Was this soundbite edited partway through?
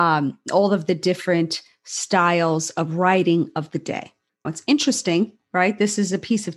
yes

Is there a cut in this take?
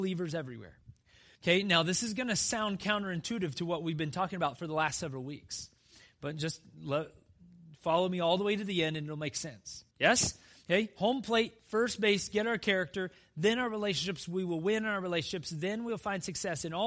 yes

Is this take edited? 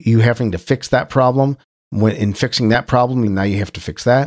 yes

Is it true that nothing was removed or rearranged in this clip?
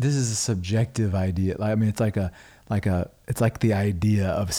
yes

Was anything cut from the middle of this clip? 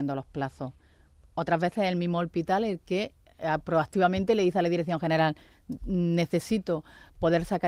no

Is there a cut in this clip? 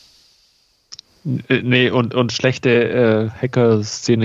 no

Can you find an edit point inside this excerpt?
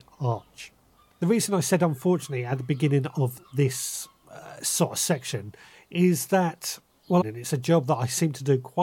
yes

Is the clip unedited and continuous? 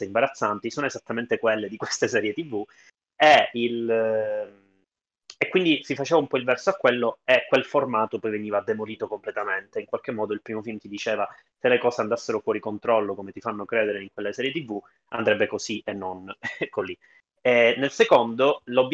yes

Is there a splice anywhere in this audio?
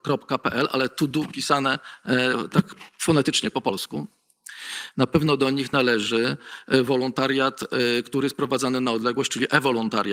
yes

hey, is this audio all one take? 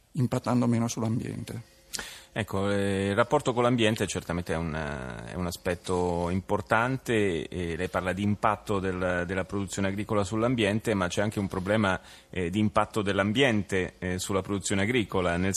yes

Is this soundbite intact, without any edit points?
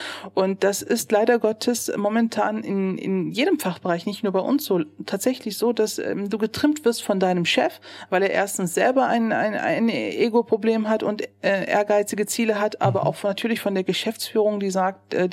yes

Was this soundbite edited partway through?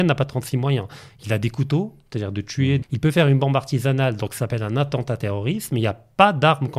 yes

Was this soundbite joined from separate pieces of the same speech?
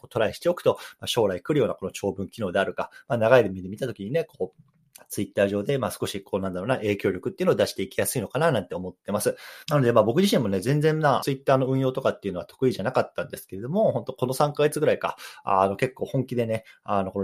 yes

